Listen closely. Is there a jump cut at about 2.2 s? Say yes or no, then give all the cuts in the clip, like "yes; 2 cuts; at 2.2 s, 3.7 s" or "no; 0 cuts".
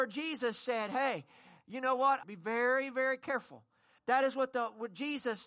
yes; 2 cuts; at 2.2 s, 4.0 s